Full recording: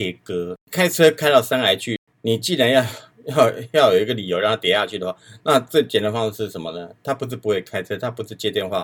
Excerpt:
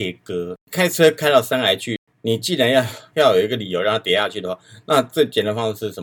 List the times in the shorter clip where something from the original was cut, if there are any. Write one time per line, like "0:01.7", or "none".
0:03.1